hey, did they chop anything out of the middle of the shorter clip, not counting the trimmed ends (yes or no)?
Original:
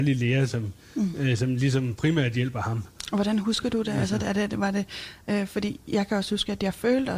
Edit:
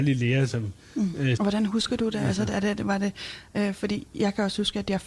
yes